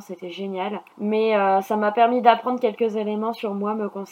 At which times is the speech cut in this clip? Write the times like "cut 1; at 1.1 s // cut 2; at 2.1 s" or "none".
cut 1; at 0.9 s